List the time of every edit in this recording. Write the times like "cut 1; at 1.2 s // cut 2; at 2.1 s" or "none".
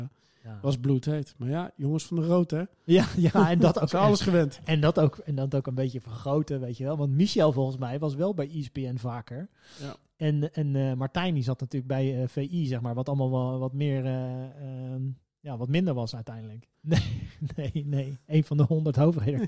cut 1; at 16.7 s